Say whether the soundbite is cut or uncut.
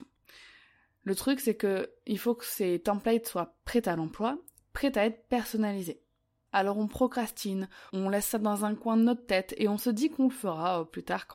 cut